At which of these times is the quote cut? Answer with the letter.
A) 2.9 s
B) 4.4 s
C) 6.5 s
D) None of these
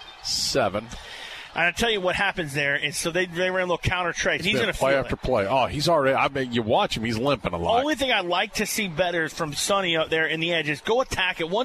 B